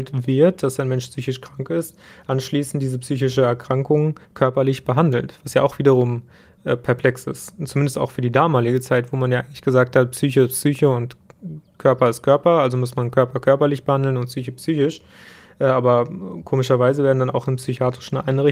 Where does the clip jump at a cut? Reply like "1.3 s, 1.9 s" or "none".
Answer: none